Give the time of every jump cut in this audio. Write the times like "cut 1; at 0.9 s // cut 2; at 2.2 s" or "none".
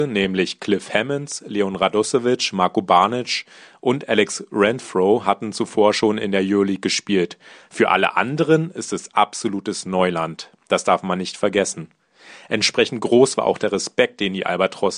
none